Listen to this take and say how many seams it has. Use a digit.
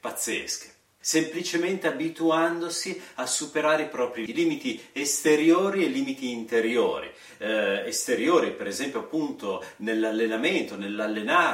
2